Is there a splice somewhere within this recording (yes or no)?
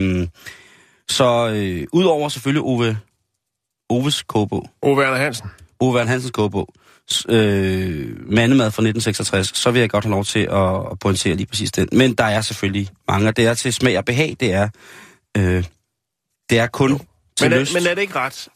no